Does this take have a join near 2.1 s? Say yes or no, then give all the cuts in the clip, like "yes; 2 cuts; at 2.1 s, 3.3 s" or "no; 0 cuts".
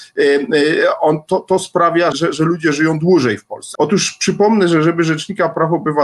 yes; 2 cuts; at 2.1 s, 3.8 s